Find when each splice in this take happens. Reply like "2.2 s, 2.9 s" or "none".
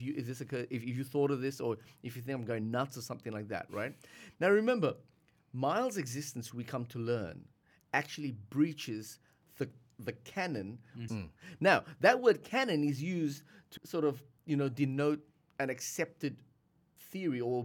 11.1 s, 13.8 s